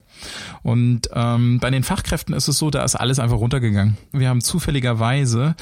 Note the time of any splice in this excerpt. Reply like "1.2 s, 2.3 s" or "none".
4.1 s